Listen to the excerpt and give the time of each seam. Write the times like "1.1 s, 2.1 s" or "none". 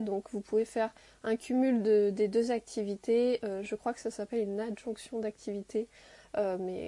none